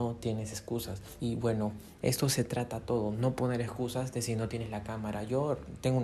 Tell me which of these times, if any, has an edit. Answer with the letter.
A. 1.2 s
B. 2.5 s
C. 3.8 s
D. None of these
A